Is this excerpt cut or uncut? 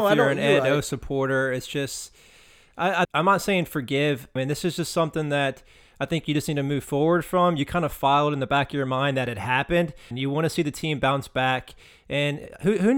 cut